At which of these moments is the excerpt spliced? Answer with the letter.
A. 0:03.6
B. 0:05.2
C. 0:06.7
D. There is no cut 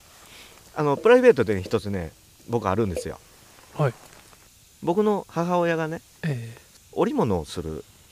D